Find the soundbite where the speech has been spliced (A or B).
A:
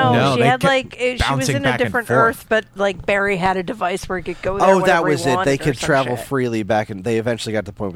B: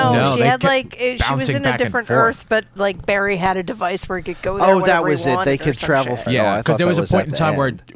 B